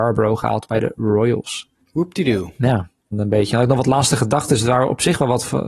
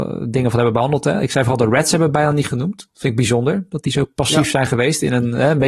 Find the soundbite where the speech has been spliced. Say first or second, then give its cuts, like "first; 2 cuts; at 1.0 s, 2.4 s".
first; 2 cuts; at 1.8 s, 3.1 s